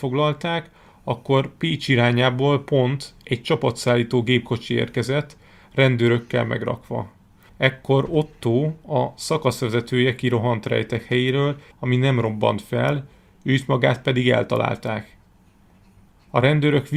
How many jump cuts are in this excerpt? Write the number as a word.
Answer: two